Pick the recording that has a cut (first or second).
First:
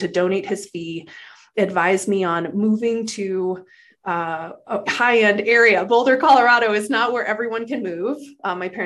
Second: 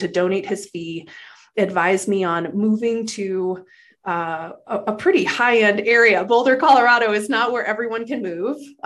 first